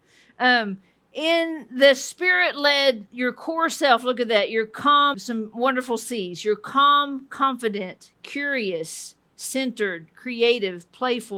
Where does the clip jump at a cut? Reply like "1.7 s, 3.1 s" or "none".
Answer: 5.1 s